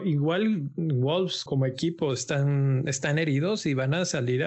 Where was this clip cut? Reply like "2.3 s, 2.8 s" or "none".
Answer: 1.5 s